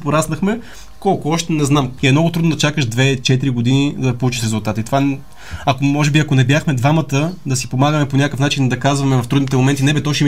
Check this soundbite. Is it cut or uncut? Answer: cut